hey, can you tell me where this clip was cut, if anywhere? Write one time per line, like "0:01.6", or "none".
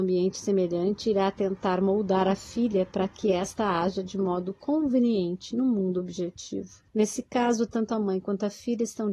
0:06.9